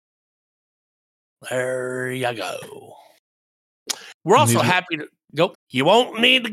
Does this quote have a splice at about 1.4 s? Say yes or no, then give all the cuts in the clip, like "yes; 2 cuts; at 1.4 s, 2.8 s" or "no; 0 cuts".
no; 2 cuts; at 4.2 s, 5.5 s